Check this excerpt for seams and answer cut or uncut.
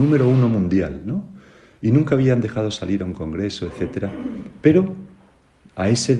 uncut